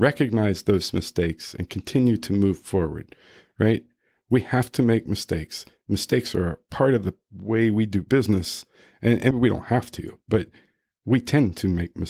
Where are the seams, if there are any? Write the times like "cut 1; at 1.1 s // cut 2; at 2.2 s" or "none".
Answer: cut 1; at 9.3 s